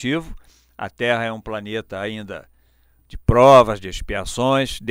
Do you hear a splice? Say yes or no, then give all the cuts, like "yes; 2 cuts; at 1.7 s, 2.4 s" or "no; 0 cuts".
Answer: no; 0 cuts